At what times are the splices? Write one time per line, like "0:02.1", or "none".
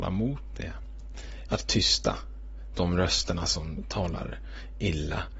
0:01.5